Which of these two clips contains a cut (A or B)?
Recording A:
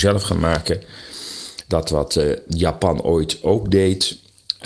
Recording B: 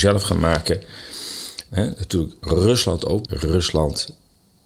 B